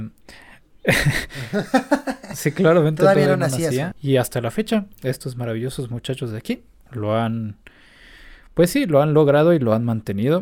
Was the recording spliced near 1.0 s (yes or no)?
no